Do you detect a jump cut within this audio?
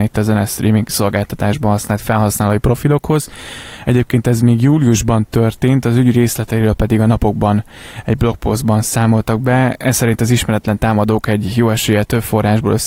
no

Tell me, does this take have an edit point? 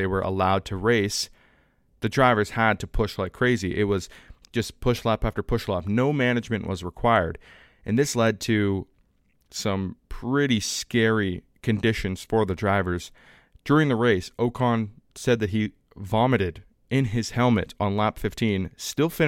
no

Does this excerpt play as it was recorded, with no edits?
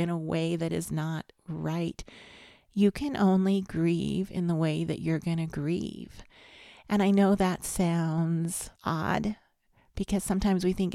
no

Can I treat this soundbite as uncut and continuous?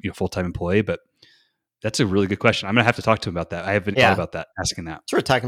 no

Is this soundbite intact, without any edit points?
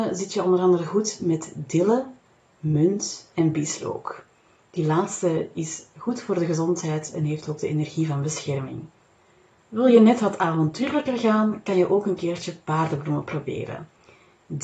yes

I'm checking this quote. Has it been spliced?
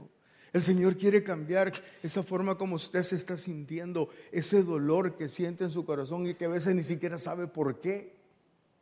no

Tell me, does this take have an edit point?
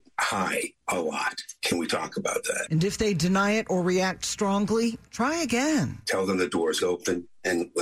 yes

